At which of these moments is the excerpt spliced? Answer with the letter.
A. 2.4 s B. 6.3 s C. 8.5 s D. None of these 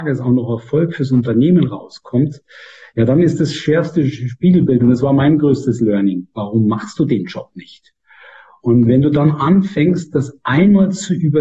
B